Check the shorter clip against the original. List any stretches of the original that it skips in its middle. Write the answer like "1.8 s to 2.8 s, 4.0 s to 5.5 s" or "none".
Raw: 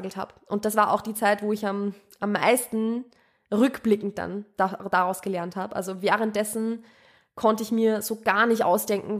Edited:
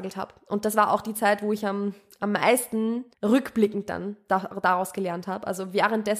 3.1 s to 3.4 s

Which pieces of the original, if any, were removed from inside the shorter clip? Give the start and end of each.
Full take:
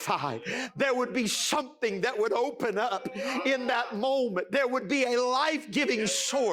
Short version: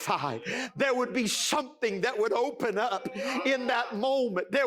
none

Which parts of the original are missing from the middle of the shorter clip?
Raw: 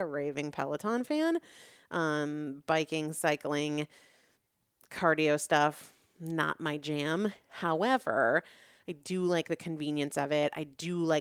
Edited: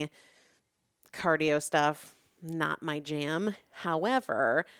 none

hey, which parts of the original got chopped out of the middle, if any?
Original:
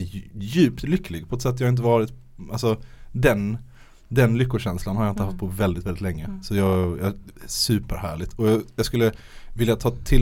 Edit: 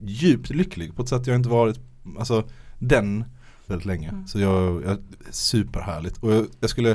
4.0 s to 5.8 s

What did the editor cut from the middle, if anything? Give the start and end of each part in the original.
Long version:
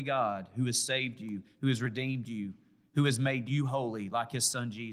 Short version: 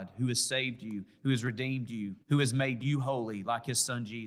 2.6 s to 2.9 s

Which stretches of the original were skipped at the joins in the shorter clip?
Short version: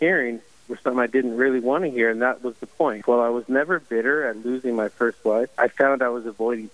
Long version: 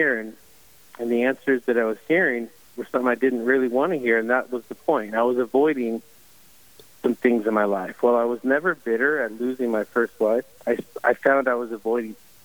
5.1 s to 8.0 s, 10.5 s to 11.0 s

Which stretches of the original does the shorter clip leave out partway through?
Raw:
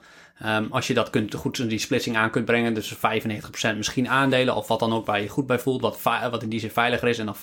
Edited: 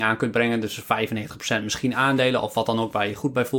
none

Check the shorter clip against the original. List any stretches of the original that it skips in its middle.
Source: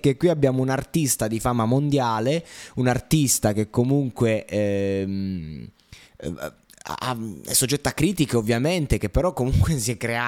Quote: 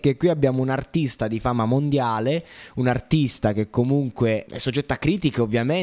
4.5 s to 7.4 s

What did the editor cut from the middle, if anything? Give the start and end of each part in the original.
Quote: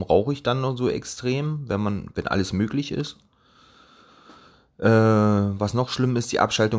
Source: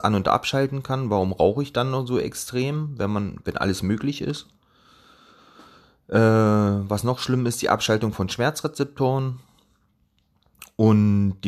none

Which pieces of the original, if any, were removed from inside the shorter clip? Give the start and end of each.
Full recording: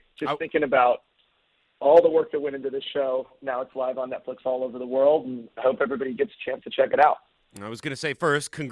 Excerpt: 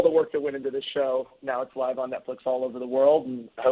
none

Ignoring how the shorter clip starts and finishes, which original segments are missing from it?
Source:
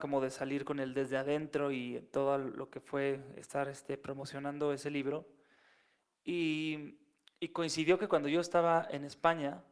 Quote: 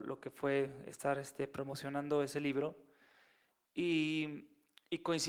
none

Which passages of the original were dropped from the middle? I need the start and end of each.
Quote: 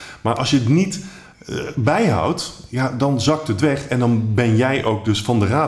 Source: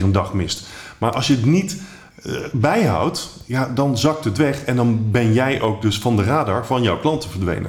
none

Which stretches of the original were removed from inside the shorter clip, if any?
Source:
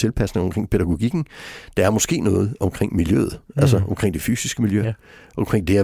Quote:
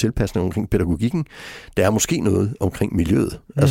none

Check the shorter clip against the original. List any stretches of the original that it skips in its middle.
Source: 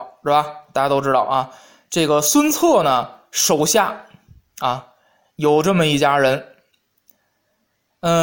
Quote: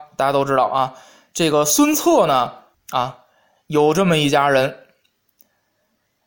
3.3 s to 4.4 s

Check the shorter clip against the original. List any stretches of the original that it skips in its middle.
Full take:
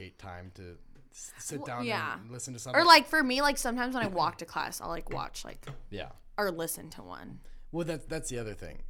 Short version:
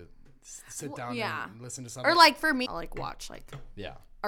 3.3 s to 4.8 s

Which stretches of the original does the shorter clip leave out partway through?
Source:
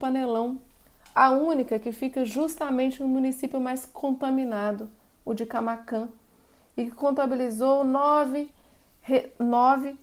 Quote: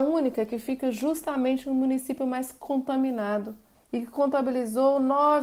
5.1 s to 6.6 s

